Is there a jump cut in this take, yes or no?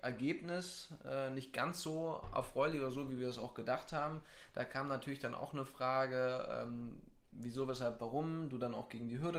no